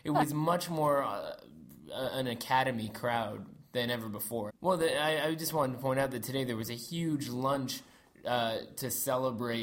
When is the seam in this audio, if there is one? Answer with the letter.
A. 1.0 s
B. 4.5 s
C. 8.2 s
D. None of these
B